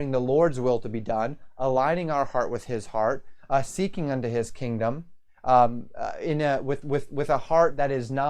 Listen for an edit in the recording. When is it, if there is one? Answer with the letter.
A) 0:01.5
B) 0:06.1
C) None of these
C